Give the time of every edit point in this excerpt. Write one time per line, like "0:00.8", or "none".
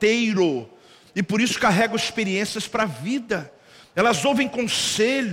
0:01.1